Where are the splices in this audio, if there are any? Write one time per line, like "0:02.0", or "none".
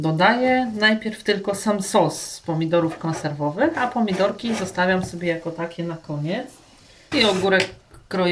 0:07.1